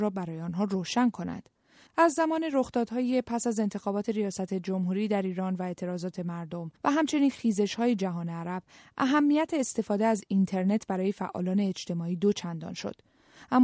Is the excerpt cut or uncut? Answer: cut